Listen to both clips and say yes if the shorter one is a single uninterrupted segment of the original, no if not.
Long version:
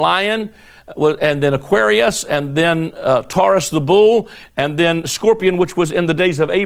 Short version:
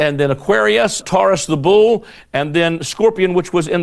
no